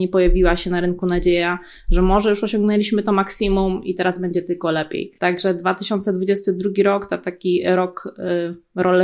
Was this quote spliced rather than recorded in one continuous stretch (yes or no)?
no